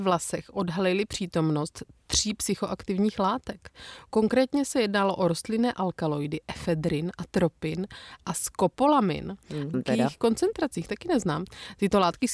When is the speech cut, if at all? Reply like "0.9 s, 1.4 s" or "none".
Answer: 9.7 s